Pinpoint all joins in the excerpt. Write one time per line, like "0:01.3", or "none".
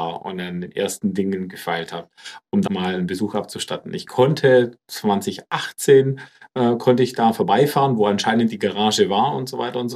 0:02.7